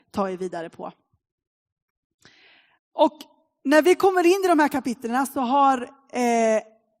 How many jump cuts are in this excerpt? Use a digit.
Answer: 0